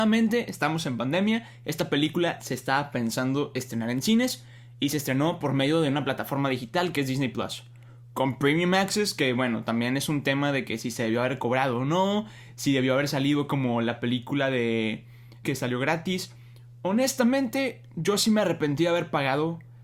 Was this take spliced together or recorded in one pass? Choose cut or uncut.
cut